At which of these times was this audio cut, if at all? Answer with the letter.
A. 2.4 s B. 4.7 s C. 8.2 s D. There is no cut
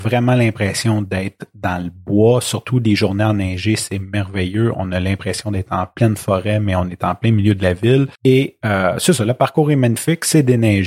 C